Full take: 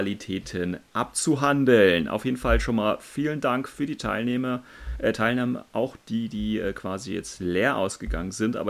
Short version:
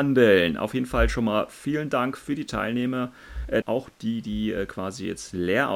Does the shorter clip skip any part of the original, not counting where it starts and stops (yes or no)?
yes